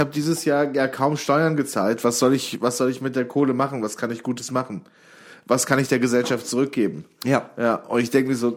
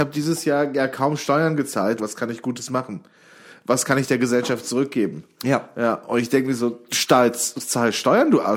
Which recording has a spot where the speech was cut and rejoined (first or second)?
second